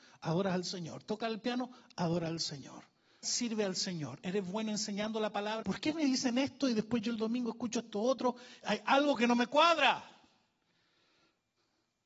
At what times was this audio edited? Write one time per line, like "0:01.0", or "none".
0:03.2
0:05.6

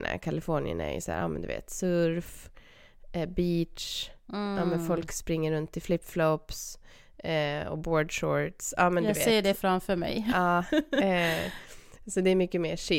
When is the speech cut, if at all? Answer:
none

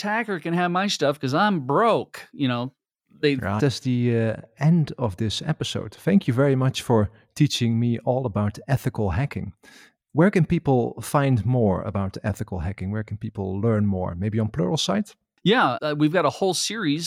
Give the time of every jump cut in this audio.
0:03.6
0:15.8

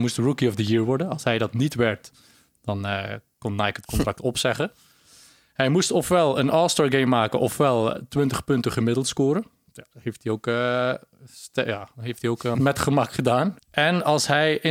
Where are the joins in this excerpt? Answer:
0:12.5
0:13.6

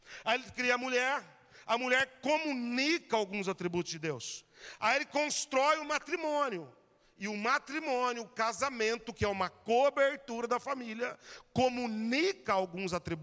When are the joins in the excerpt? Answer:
none

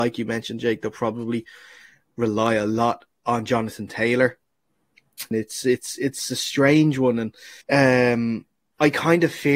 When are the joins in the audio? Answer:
0:05.3
0:07.6

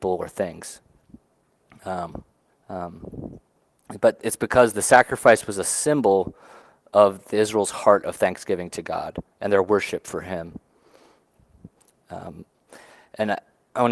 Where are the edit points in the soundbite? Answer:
0:02.5
0:09.3
0:11.9

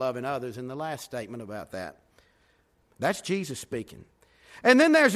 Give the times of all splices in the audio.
0:02.8

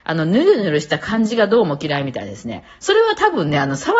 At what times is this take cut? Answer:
none

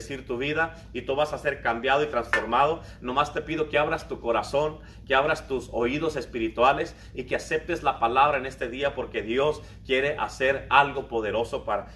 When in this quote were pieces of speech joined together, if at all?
none

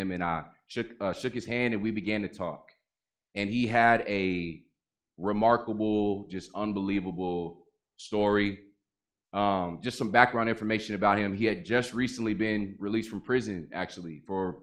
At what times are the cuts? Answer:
none

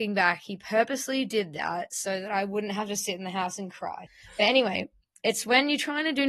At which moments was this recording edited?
0:04.1

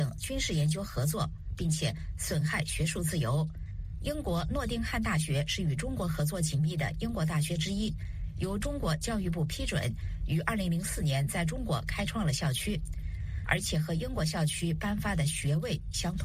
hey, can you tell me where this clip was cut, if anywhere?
0:13.4

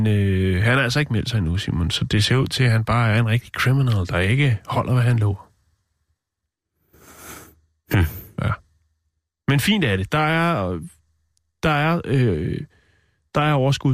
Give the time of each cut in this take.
none

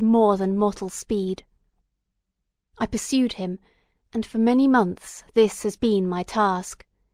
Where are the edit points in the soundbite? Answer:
none

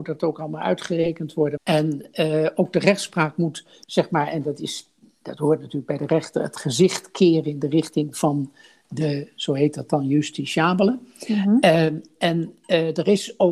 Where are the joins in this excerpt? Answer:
0:01.6

